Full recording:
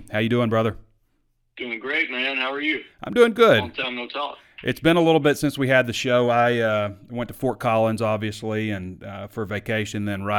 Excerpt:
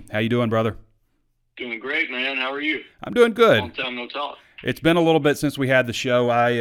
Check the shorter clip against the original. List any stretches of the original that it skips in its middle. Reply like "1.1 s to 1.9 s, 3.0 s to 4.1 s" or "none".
none